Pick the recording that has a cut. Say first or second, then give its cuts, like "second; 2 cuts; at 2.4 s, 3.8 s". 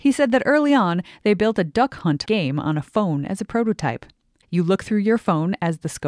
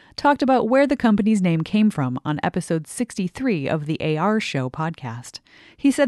first; 2 cuts; at 2.2 s, 4.4 s